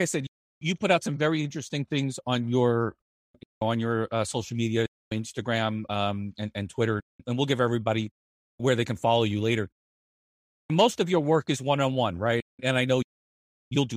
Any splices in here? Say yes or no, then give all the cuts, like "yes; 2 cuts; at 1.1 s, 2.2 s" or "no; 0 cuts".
no; 0 cuts